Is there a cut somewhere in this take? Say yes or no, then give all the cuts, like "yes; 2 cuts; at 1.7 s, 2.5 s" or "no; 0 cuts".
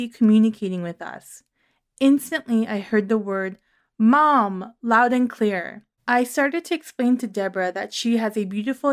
yes; 1 cut; at 6.0 s